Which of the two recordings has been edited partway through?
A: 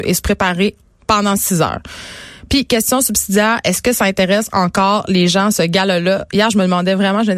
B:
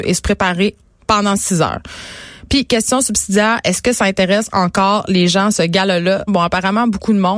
B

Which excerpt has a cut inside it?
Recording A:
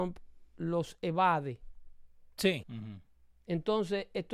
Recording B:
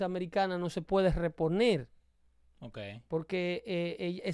A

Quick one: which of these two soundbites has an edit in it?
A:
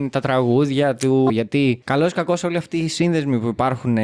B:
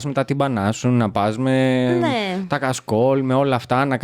A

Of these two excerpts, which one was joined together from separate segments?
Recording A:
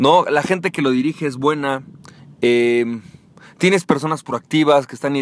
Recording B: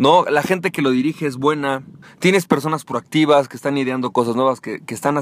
B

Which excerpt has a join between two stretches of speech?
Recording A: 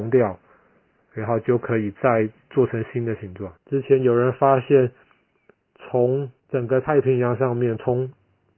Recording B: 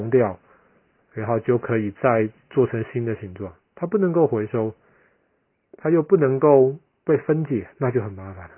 A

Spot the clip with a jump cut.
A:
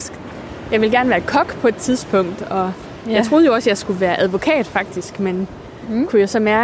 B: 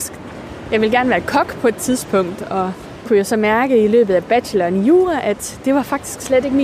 B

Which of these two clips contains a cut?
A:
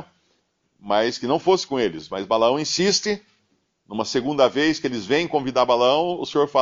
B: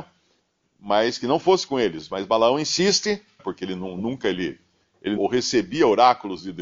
B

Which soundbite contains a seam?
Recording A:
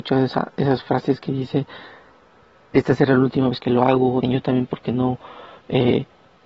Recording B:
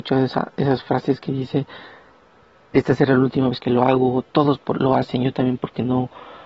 A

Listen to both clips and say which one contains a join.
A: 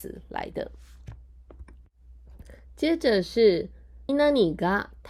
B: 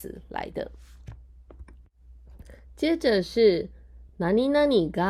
A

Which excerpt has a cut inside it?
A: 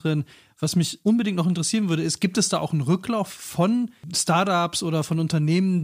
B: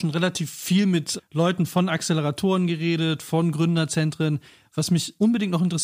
B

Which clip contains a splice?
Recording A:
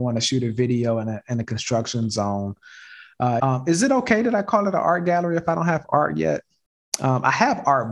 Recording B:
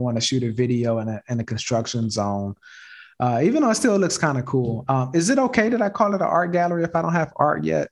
A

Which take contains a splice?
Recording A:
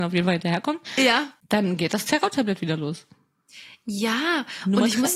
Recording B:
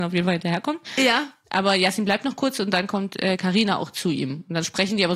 A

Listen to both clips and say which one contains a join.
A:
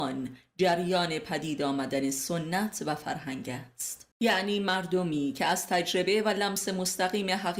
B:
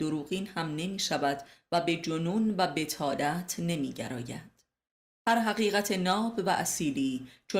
A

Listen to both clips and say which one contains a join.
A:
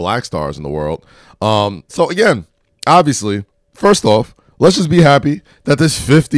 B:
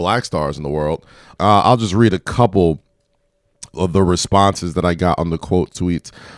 B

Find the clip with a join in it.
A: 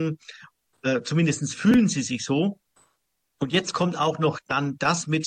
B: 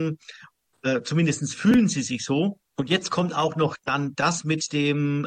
B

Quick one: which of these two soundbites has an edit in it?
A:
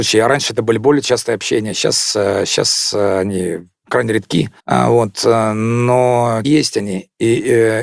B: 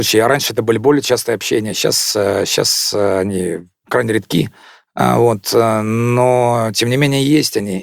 A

